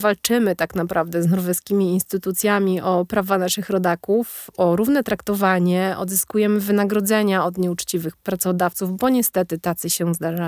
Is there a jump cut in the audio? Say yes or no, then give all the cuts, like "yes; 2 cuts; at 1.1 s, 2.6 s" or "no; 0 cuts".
no; 0 cuts